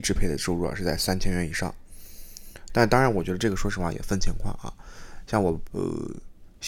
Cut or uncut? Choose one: cut